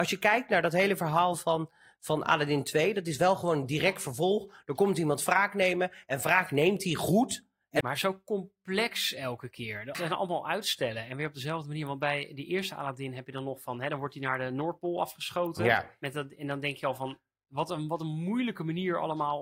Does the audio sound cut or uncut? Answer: cut